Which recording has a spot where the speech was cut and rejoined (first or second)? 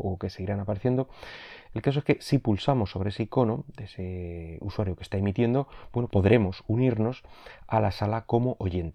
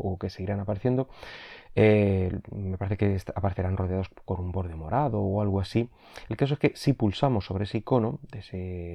first